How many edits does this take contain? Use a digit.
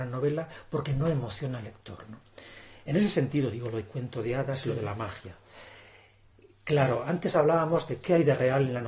0